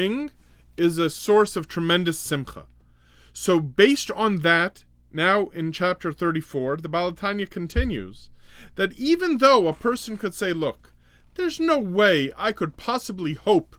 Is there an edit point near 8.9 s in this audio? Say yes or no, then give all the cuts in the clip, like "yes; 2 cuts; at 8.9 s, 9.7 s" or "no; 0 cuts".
no; 0 cuts